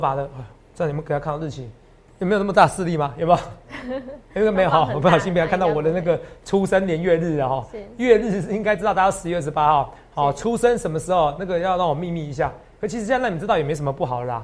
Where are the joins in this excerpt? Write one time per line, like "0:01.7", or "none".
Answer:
0:02.1

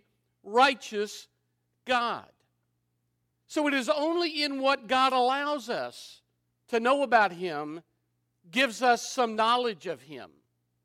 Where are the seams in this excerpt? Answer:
none

